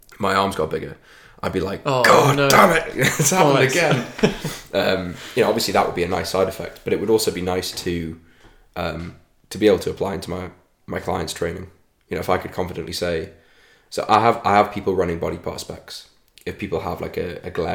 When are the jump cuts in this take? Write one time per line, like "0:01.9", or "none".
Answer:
none